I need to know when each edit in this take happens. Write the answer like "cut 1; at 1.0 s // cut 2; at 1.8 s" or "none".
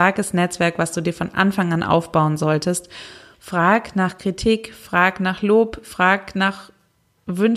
cut 1; at 3.3 s